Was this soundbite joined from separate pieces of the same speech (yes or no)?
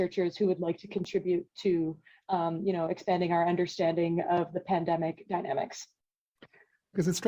no